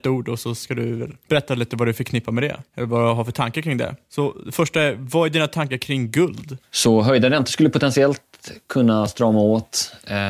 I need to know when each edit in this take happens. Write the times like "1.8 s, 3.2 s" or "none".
6.6 s

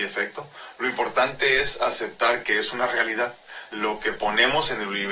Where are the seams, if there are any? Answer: 3.7 s

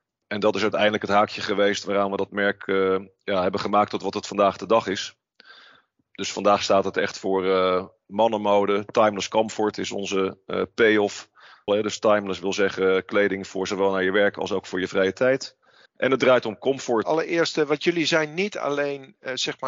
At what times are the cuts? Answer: 11.7 s, 15.9 s, 17.0 s

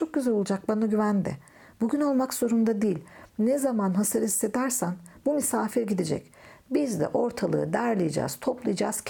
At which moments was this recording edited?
none

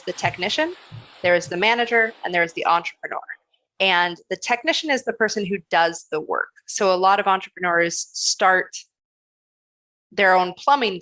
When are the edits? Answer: none

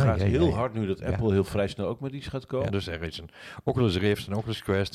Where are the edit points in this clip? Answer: 2.7 s

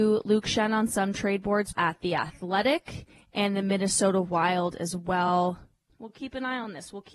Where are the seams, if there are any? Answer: 1.7 s, 5.9 s

